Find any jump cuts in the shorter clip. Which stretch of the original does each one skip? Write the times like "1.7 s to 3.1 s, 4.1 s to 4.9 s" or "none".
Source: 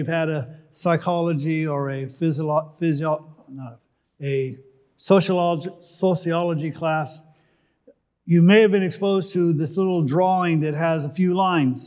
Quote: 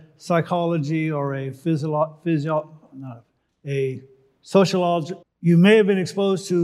5.8 s to 8.1 s